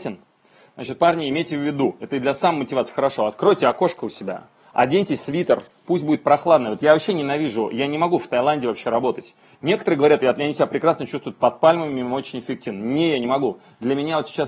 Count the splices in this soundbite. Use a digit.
0